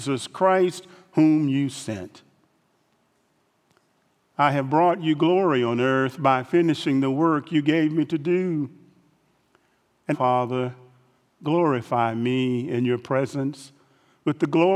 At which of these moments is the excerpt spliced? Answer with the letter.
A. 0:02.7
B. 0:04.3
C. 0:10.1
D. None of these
C